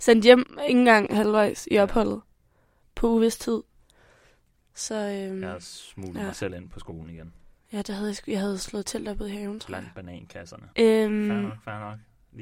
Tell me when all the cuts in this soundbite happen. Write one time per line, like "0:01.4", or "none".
0:07.6
0:10.7